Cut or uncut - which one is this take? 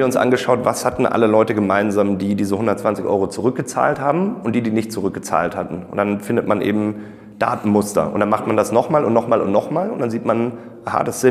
uncut